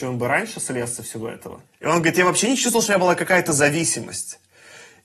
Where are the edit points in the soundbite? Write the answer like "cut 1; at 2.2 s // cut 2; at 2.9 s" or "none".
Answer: cut 1; at 1.7 s